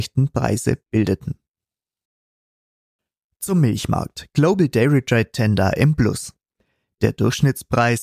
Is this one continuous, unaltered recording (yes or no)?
yes